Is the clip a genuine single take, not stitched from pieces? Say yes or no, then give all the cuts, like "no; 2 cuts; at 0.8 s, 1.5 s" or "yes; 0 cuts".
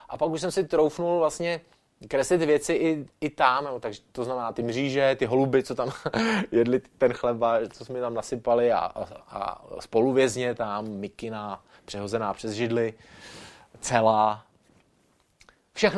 yes; 0 cuts